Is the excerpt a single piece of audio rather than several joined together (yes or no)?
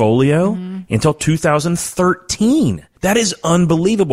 no